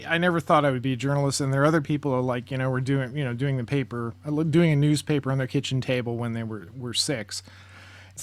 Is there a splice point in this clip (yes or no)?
no